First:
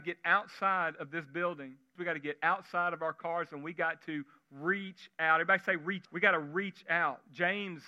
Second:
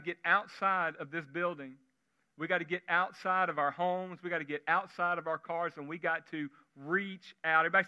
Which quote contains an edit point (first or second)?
first